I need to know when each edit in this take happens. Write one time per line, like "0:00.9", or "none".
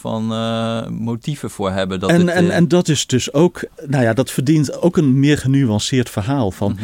none